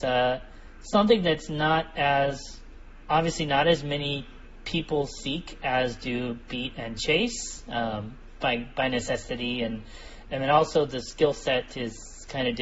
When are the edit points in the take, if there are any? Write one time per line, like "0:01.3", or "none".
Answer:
none